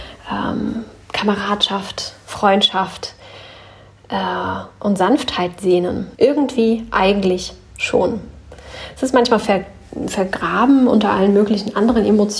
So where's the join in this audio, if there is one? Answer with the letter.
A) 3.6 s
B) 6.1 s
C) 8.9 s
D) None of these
B